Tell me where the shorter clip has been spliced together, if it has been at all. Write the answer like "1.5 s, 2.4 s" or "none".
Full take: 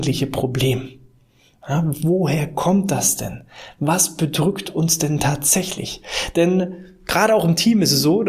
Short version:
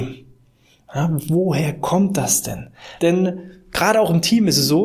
3.0 s